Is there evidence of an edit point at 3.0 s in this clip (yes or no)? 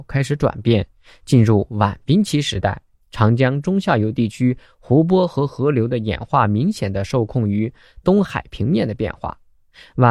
yes